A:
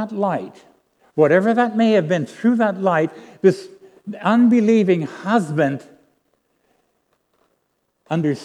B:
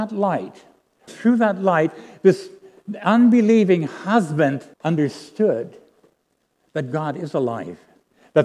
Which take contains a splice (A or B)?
B